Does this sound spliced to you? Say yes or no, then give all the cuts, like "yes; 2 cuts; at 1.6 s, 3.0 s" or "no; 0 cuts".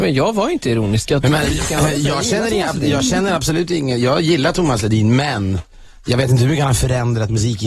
no; 0 cuts